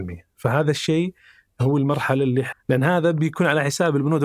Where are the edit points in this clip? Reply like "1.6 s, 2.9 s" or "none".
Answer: 2.5 s